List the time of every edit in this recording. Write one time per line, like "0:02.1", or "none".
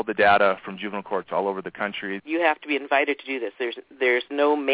0:02.2